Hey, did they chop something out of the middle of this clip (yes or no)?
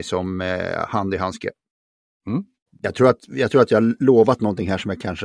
yes